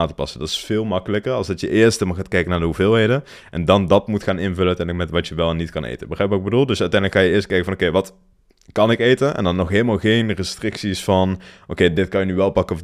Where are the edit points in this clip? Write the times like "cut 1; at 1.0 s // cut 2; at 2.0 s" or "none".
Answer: none